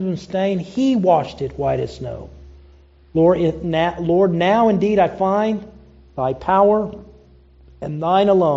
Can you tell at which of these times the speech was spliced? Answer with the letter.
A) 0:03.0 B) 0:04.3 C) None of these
C